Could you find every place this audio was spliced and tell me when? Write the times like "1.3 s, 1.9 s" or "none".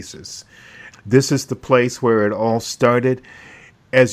0.9 s